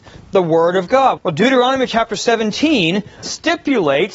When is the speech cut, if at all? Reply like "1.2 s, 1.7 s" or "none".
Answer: 1.2 s, 3.2 s